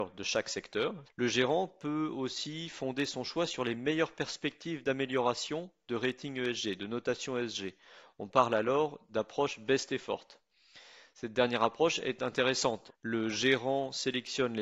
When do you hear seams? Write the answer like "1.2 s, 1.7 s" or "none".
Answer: 1.0 s, 12.9 s